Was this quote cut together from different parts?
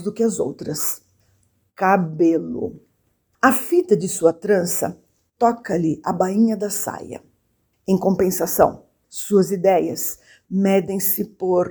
no; 0 cuts

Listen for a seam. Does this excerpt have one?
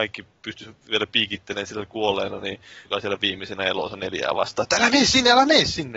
yes; 1 cut; at 2.9 s

